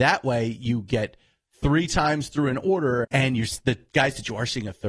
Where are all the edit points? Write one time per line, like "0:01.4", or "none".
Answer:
0:03.0

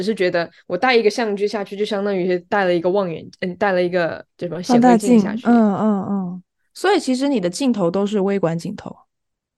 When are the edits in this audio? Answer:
none

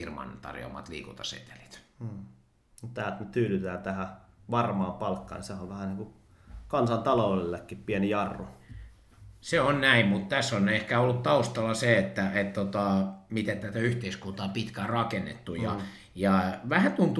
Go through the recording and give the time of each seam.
none

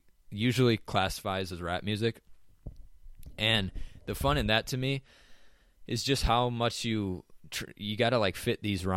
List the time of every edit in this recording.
none

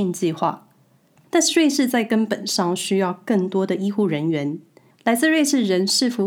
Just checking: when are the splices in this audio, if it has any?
0:01.2

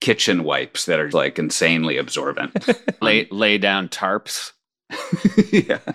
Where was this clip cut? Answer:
0:01.1
0:03.0

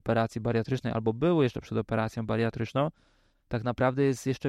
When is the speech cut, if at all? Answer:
0:03.3

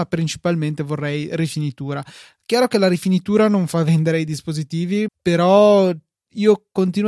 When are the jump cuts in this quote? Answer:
0:05.1

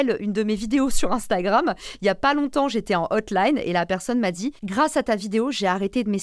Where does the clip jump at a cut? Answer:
0:04.6

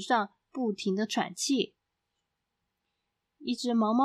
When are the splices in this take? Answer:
none

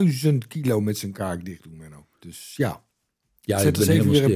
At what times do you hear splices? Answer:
0:02.1

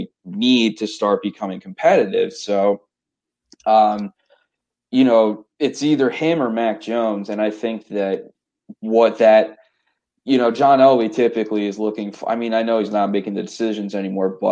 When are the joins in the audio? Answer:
none

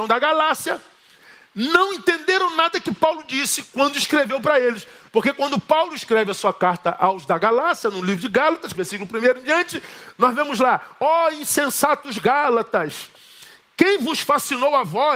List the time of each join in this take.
0:08.7

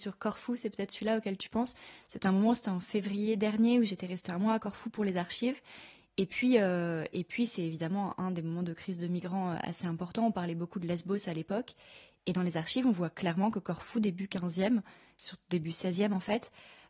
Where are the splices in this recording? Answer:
none

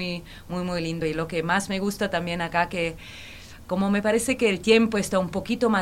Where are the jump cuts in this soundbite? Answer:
none

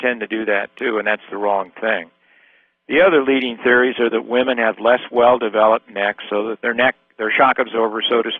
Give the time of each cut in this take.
0:06.6

